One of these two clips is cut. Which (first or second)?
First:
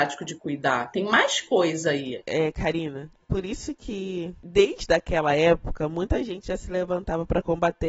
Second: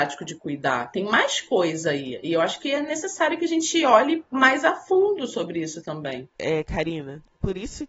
first